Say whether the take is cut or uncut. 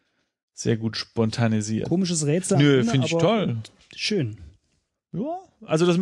uncut